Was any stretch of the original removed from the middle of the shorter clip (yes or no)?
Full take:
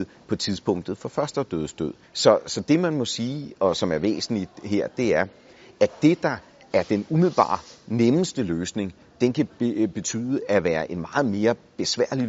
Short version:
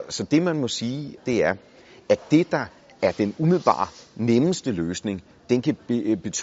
yes